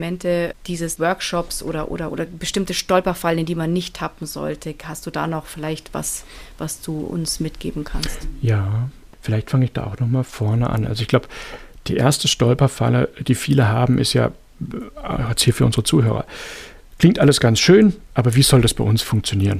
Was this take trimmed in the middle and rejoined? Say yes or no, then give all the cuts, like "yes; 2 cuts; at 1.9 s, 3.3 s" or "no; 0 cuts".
yes; 2 cuts; at 2.1 s, 9.1 s